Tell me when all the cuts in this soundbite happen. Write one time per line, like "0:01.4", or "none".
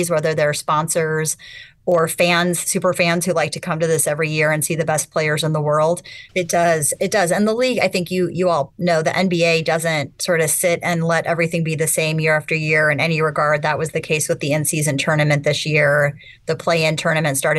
0:06.3